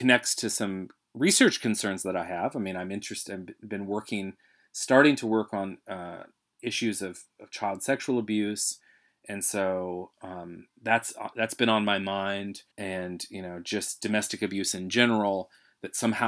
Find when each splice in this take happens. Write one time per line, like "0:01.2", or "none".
0:12.7